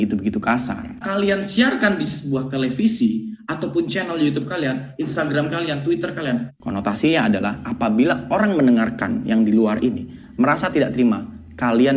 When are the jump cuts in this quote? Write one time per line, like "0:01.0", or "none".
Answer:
0:01.0
0:06.5